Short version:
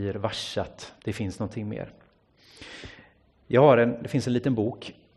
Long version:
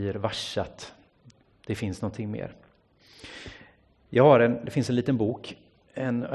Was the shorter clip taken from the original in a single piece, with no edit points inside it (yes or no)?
no